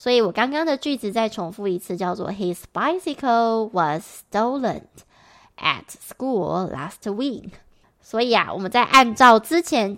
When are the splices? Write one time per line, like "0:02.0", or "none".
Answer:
0:07.8